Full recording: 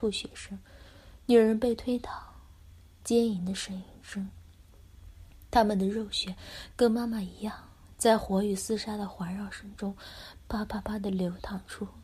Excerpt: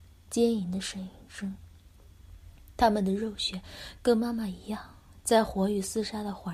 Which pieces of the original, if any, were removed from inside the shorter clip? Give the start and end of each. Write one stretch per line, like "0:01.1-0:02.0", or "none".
none